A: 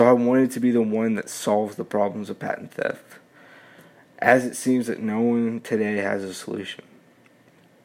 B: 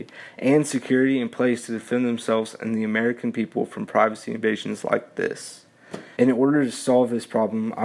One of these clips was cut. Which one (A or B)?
B